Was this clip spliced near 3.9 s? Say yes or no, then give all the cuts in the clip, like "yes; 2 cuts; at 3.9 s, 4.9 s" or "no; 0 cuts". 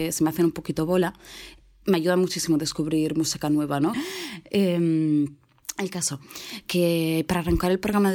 yes; 1 cut; at 3.9 s